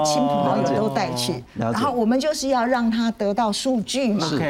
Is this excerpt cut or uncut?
uncut